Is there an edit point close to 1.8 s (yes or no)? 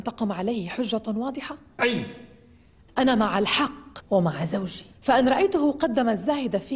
yes